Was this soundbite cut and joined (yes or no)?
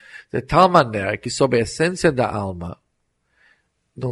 no